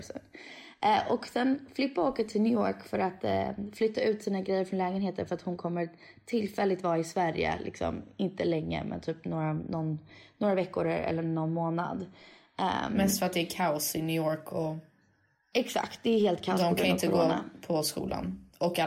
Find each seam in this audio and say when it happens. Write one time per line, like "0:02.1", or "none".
none